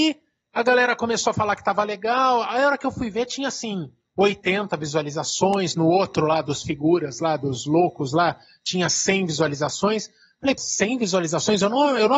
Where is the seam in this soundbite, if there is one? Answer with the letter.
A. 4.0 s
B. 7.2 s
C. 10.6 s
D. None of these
C